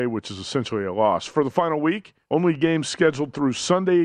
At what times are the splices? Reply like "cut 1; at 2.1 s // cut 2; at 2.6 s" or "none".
cut 1; at 2.2 s